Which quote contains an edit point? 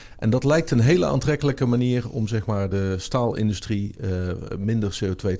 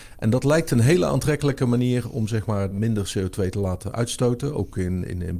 second; 1 cut; at 2.7 s

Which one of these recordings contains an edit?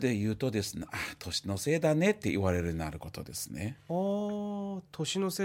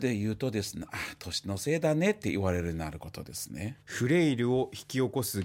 second; 1 cut; at 3.8 s

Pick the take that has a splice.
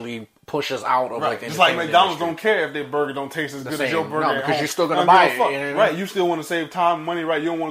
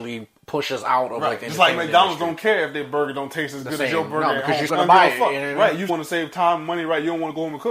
second; 2 cuts; at 4.7 s, 5.9 s

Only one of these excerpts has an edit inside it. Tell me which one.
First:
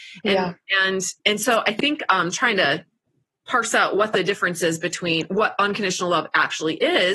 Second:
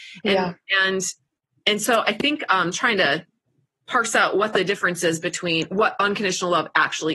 first; 1 cut; at 1.2 s

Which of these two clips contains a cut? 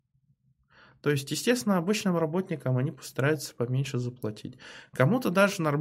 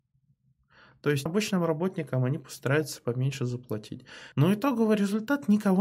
second; 2 cuts; at 1.3 s, 4.3 s

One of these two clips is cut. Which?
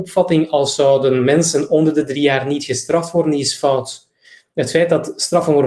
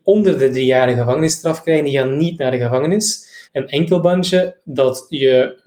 second; 1 cut; at 3.5 s

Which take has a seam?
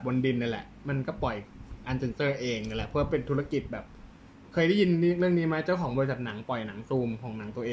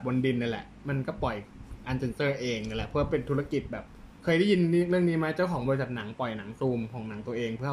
second; 1 cut; at 4.2 s

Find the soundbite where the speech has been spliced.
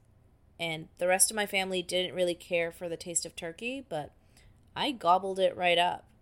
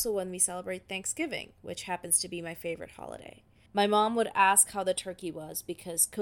second; 1 cut; at 3.7 s

